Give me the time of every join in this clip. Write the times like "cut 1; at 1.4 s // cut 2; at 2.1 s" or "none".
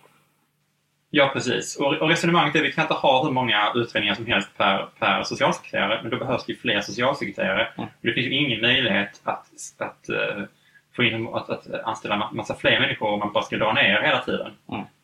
none